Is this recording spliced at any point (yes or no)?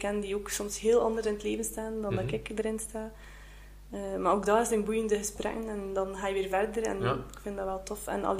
no